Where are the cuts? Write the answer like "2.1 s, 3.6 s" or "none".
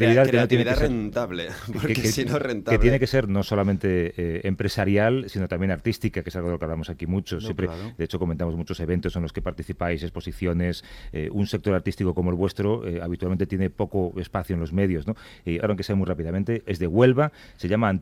15.6 s, 16.7 s